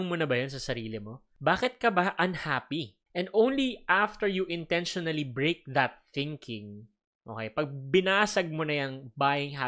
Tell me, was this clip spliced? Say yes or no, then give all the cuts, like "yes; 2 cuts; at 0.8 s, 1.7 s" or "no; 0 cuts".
no; 0 cuts